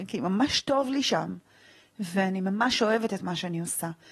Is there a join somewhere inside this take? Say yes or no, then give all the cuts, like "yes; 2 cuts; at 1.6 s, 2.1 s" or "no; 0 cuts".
no; 0 cuts